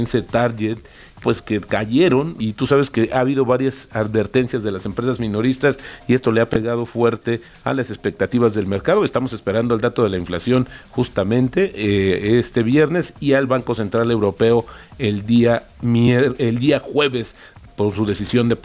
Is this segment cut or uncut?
cut